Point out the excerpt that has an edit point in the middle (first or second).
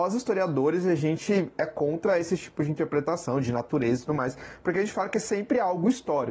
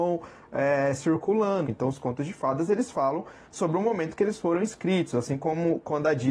second